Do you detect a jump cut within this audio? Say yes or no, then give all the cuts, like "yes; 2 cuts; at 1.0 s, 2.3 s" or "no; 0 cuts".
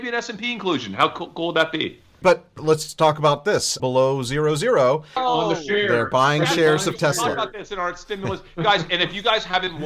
yes; 3 cuts; at 2.2 s, 3.8 s, 5.2 s